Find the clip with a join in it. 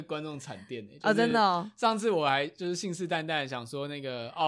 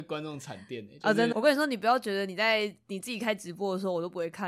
second; 1 cut; at 1.3 s

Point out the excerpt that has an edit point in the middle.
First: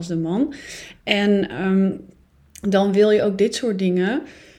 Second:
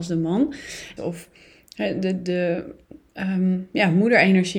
second; 1 cut; at 1.0 s

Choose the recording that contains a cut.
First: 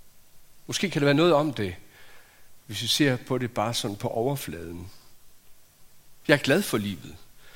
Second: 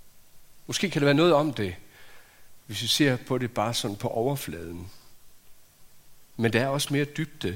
first; 1 cut; at 6.2 s

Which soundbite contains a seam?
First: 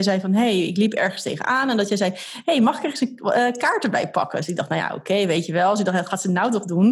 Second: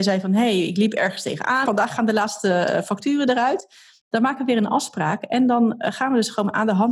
second; 1 cut; at 1.7 s

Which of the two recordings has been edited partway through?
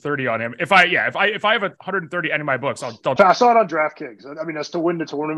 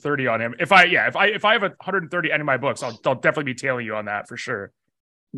first; 1 cut; at 3.2 s

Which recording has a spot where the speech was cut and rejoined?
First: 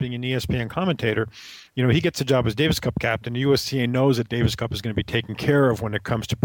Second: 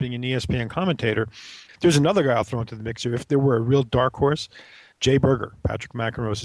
second; 1 cut; at 1.7 s

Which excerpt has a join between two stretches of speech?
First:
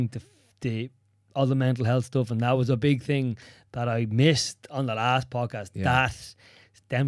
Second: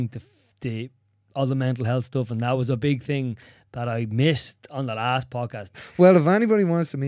second; 1 cut; at 5.7 s

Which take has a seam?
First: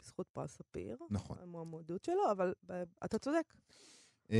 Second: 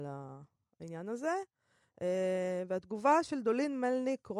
first; 1 cut; at 3.0 s

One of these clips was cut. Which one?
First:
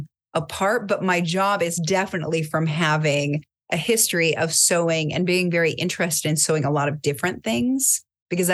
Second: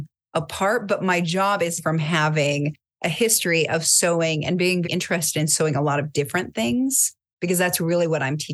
second; 2 cuts; at 1.8 s, 4.8 s

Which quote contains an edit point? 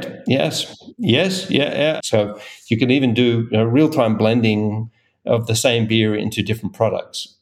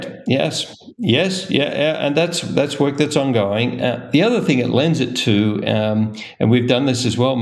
first; 1 cut; at 2.0 s

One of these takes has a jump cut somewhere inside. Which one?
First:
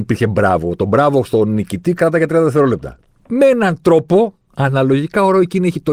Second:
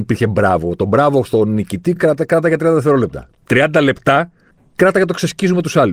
first; 2 cuts; at 2.0 s, 3.1 s

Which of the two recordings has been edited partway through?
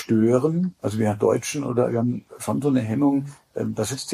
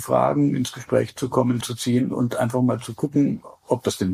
second; 1 cut; at 1.6 s

